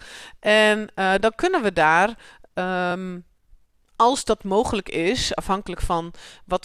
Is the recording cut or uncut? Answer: uncut